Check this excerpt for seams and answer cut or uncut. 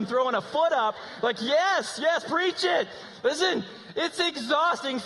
uncut